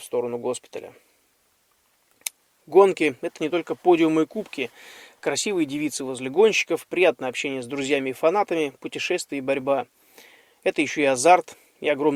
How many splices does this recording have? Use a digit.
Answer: 0